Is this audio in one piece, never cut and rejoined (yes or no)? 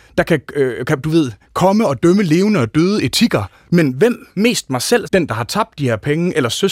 no